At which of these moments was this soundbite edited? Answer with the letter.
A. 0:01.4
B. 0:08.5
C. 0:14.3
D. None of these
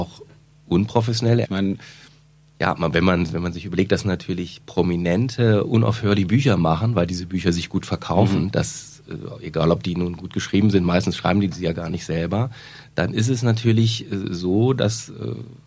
A